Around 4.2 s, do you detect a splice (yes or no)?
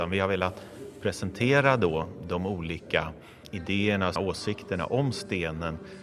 yes